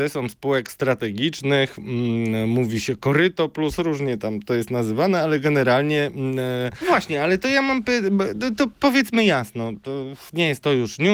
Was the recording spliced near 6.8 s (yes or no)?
yes